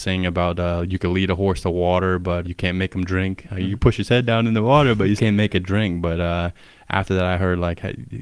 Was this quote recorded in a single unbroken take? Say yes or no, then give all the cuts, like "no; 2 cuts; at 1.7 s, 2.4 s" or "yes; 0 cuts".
no; 2 cuts; at 2.4 s, 5.2 s